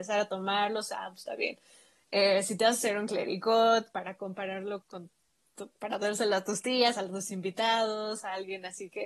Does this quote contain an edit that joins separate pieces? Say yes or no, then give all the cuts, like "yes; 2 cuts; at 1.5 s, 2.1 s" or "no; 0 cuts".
yes; 1 cut; at 4.8 s